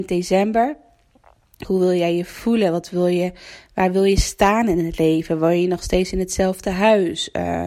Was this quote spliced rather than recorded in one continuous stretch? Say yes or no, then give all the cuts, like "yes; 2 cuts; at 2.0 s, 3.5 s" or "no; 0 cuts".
yes; 1 cut; at 1.6 s